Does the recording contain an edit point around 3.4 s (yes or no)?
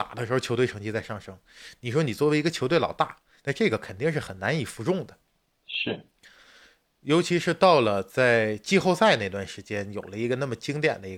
yes